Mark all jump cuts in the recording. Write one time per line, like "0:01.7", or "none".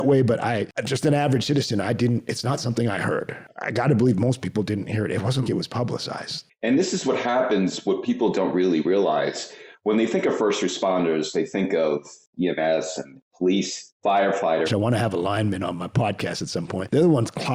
0:05.4
0:14.6